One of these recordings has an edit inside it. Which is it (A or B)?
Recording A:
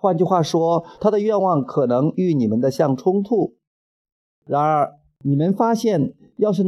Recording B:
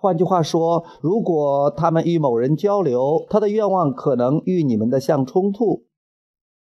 A